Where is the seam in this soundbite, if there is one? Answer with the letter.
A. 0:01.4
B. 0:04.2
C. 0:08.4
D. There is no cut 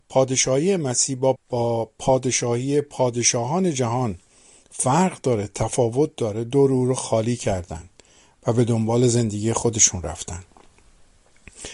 A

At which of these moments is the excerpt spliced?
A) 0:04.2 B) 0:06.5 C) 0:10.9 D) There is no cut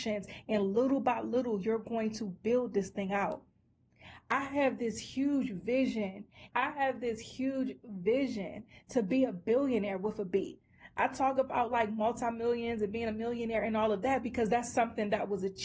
B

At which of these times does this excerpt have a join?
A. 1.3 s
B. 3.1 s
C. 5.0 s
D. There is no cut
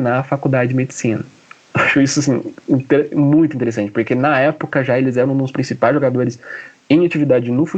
D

